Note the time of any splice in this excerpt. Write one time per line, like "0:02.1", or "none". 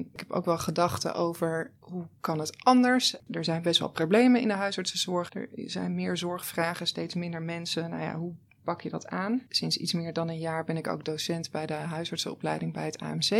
0:05.3
0:09.5